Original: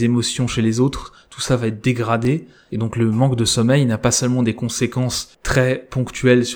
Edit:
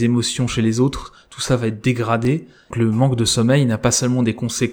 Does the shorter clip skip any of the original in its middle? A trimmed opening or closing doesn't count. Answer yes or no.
yes